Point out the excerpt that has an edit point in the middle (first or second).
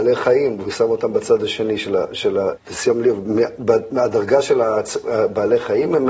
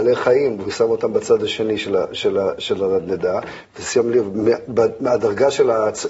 first